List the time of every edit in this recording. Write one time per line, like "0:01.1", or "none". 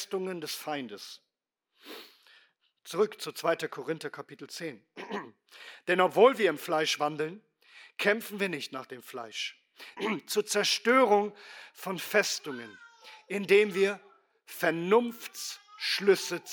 0:10.0

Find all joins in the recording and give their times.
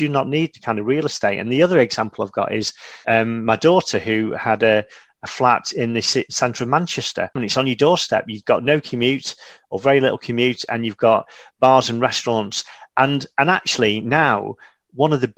0:03.0
0:07.4

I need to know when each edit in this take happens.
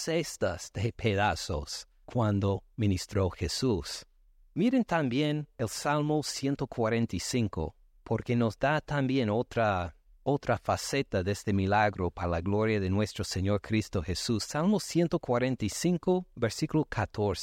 none

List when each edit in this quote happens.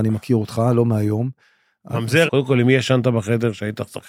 0:02.3

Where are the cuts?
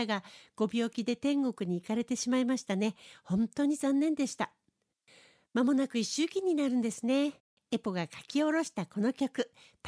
0:07.6

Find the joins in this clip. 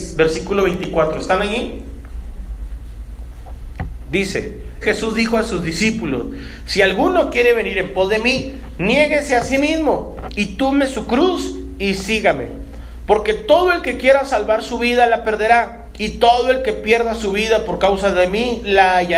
0:04.8

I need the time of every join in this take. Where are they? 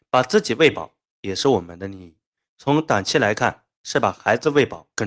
0:02.5

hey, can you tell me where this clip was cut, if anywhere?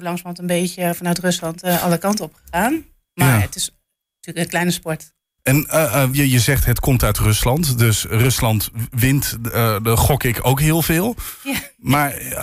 0:06.1

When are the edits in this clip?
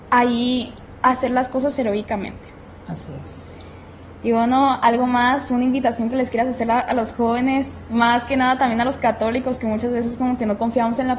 none

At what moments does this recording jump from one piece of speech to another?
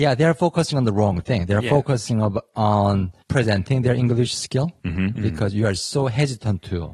0:05.2

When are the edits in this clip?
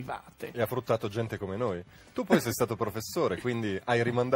none

